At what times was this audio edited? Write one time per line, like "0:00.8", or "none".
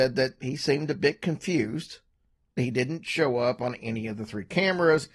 0:02.6